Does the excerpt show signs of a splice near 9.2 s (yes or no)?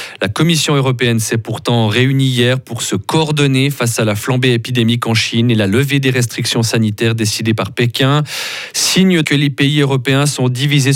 yes